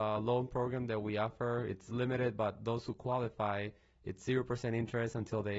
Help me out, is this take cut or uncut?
uncut